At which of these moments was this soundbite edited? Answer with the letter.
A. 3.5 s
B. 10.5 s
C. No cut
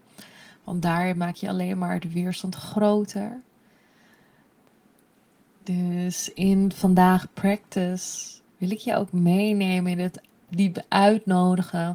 B